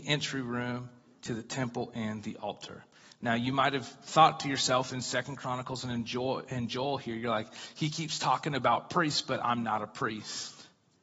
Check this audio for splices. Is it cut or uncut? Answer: uncut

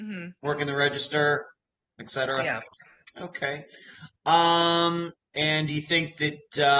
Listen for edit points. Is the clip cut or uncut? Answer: uncut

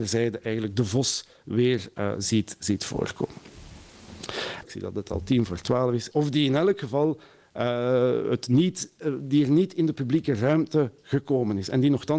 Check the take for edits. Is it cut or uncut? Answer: cut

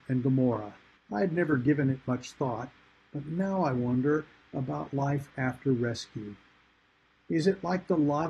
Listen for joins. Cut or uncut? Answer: cut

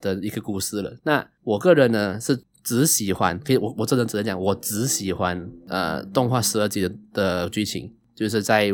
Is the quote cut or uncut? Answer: cut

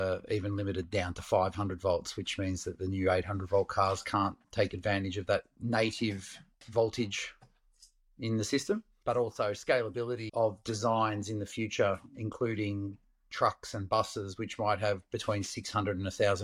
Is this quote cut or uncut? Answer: cut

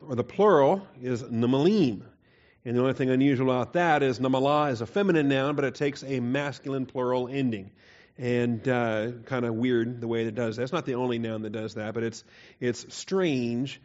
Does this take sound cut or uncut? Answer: uncut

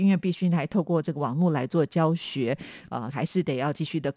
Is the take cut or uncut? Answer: cut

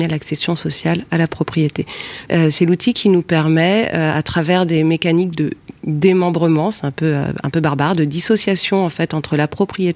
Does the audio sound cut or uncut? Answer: cut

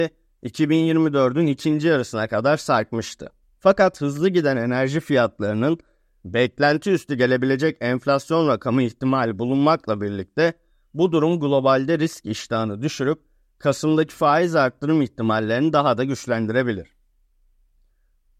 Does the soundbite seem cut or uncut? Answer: cut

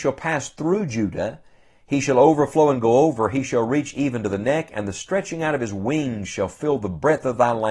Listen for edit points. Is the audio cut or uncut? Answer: uncut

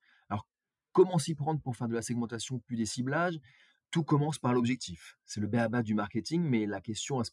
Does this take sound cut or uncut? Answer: uncut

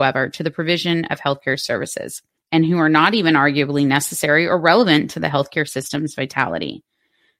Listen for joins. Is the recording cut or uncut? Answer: cut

